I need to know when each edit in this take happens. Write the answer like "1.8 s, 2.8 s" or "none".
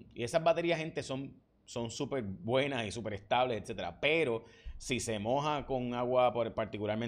none